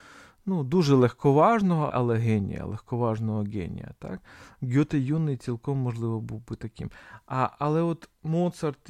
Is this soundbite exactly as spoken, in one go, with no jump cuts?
no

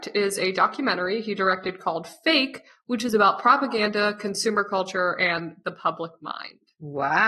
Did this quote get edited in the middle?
no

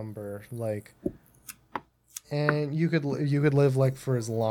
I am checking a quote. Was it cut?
yes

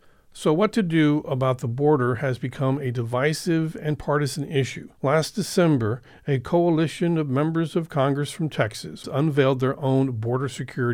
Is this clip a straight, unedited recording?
no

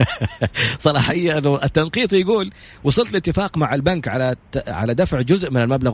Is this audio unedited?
yes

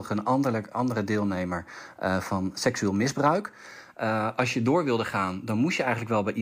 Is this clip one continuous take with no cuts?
no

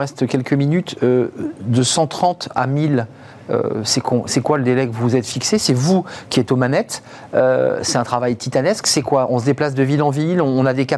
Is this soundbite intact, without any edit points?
yes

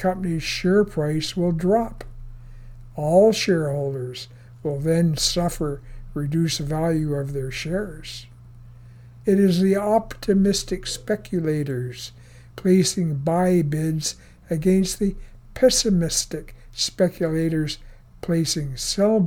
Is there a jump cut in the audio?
yes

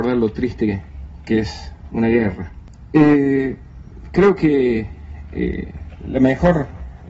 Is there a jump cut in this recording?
no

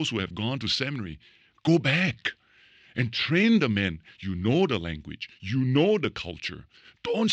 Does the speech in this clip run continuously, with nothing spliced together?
yes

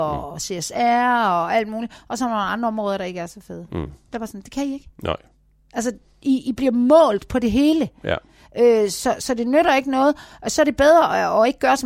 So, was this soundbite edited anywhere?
no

